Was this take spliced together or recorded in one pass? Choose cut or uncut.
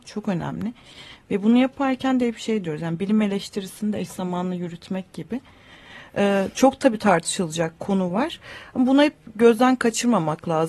uncut